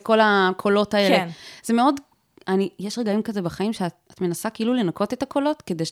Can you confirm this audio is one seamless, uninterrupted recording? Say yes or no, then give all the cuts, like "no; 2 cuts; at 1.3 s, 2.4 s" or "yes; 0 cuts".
yes; 0 cuts